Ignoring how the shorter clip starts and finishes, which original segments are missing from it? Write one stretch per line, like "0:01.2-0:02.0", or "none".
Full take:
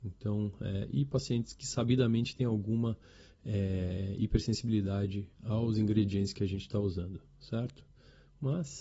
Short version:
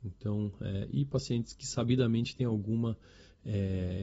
none

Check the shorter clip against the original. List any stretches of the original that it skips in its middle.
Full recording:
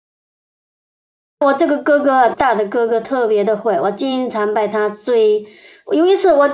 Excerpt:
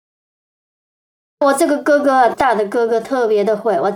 none

